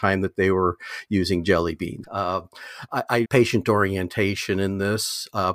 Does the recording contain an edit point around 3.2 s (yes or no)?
yes